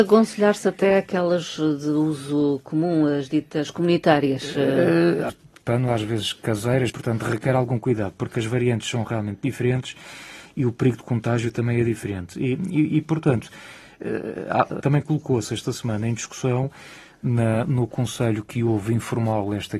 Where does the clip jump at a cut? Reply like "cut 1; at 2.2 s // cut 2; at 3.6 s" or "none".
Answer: cut 1; at 5.3 s // cut 2; at 14.8 s